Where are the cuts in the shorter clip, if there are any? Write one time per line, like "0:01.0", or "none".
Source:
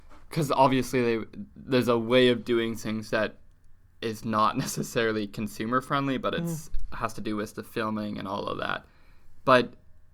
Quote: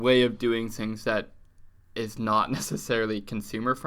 none